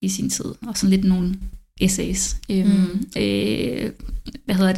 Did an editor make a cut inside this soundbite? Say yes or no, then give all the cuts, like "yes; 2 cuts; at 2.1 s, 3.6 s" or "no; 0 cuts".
yes; 1 cut; at 3.2 s